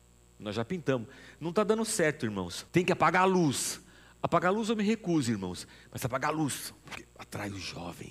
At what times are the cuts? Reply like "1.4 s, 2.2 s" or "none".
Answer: 2.7 s